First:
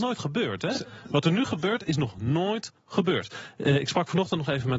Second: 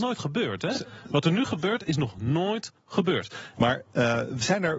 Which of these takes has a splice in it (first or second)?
second